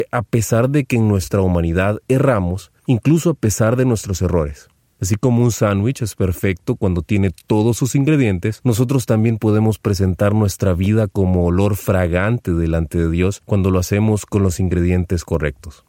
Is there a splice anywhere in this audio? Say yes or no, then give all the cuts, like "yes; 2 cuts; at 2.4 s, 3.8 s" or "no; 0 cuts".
yes; 1 cut; at 2.8 s